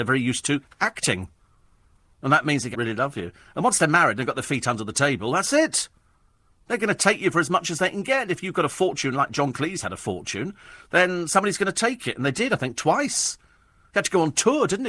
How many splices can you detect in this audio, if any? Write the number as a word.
one